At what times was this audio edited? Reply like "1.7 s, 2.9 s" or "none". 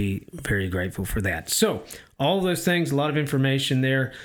none